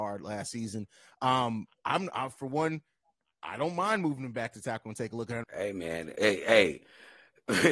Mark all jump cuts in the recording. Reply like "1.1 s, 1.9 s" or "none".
5.4 s